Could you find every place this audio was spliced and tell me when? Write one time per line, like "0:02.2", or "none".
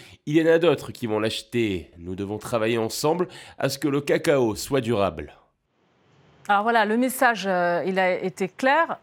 0:01.9